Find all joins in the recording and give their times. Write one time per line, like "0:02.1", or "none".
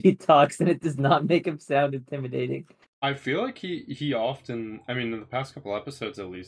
0:02.9